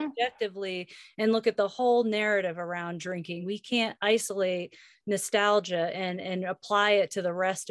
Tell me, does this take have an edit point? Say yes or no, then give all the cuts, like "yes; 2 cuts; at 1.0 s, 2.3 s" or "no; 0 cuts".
no; 0 cuts